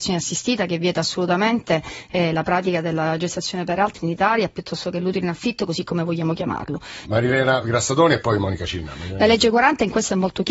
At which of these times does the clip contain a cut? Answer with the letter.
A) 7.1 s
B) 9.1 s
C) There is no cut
A